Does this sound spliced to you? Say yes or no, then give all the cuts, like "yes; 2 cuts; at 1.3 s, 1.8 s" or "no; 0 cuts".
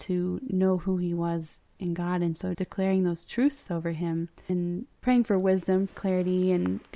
yes; 2 cuts; at 2.5 s, 5.9 s